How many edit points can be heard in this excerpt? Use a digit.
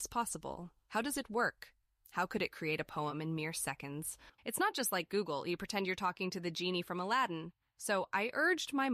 1